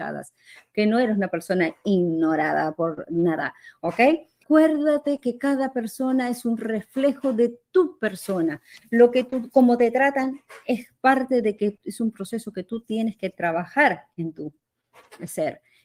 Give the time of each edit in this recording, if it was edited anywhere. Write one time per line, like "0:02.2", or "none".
0:04.4